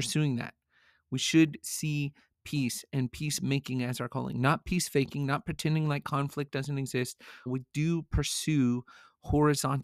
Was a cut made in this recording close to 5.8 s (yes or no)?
no